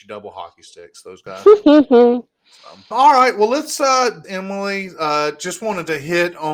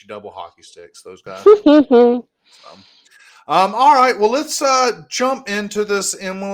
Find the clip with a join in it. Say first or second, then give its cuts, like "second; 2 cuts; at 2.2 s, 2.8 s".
first; 2 cuts; at 2.9 s, 4.2 s